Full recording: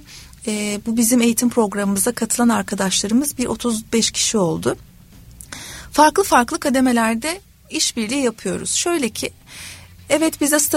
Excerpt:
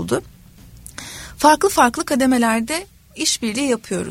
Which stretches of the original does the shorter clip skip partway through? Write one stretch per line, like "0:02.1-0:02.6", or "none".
none